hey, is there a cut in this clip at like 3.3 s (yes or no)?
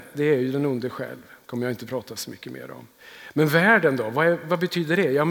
no